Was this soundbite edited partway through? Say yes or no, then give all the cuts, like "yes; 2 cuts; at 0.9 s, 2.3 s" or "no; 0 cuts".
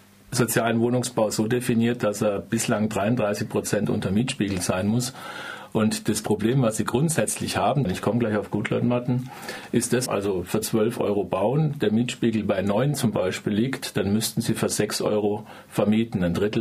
yes; 2 cuts; at 7.9 s, 10.1 s